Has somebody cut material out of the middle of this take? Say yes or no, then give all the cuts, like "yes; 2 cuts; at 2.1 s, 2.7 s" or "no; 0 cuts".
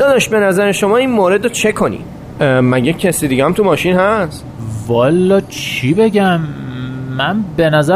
yes; 1 cut; at 2.3 s